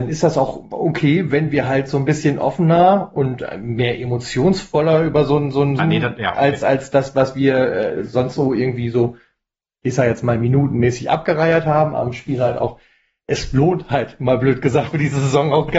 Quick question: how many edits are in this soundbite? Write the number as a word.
three